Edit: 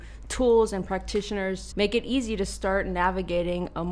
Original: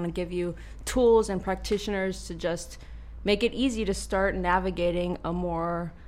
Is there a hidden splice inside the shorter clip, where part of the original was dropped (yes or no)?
yes